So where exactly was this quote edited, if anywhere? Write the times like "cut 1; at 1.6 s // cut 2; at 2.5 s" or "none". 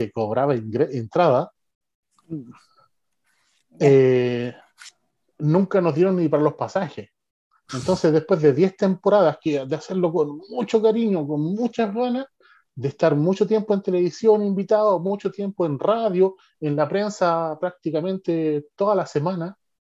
none